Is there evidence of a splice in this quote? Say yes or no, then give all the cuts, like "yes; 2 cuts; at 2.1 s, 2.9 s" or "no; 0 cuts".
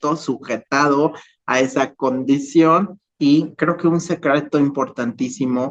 yes; 1 cut; at 3.1 s